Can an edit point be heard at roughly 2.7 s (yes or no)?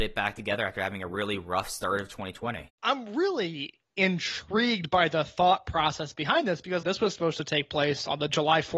yes